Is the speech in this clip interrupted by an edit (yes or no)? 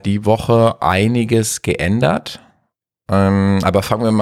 no